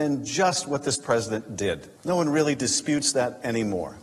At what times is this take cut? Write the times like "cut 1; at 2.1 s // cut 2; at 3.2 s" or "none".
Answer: none